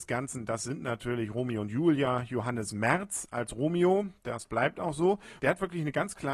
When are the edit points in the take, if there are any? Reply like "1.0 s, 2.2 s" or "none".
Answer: 5.4 s